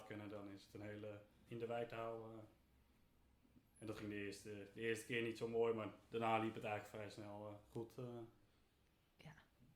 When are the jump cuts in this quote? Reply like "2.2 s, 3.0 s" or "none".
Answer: 1.5 s